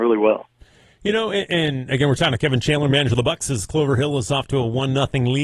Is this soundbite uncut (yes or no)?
yes